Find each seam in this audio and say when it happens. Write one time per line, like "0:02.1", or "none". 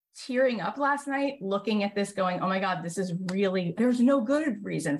0:03.8